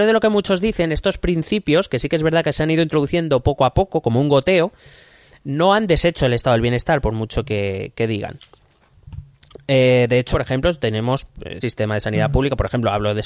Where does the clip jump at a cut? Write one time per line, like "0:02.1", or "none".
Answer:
0:10.3
0:11.6